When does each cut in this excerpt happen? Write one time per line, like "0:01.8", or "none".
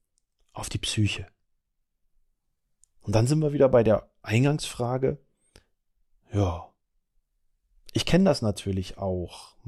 none